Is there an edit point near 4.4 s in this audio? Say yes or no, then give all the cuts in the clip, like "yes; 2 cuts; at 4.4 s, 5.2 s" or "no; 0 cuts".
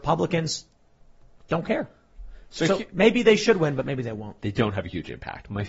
yes; 1 cut; at 4.4 s